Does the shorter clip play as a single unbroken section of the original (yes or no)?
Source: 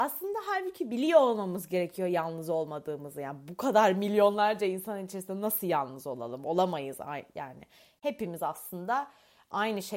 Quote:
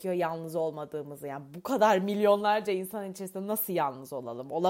yes